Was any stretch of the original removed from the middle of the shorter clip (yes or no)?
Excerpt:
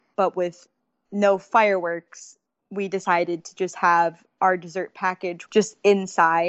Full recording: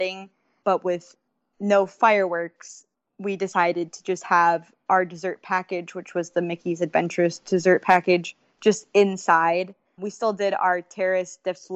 yes